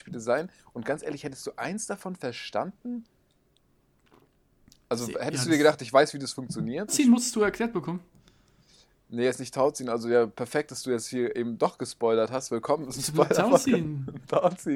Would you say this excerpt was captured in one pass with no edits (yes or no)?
no